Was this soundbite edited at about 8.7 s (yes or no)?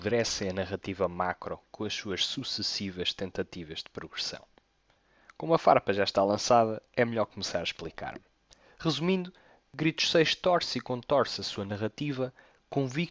no